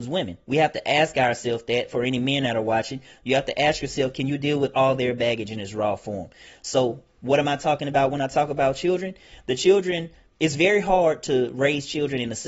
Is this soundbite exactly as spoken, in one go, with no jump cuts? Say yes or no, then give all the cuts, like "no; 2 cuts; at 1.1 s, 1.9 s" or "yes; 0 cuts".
yes; 0 cuts